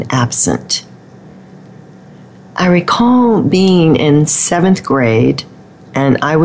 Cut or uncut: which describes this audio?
uncut